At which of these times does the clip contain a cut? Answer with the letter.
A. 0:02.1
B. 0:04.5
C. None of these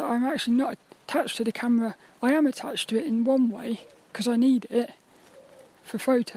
C